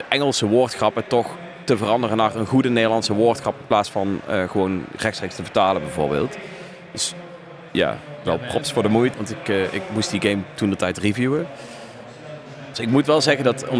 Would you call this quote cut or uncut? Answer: cut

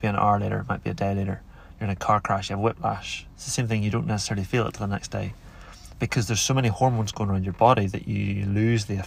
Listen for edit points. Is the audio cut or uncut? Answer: uncut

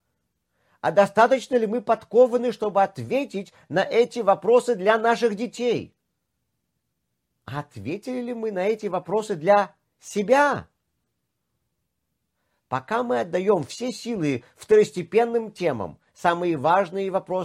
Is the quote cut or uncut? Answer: uncut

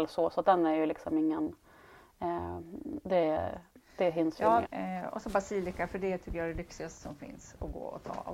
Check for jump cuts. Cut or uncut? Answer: cut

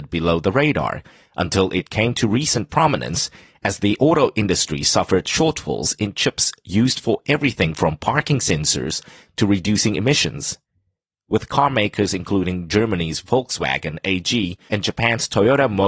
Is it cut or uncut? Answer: cut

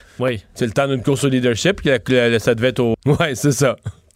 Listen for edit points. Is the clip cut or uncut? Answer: cut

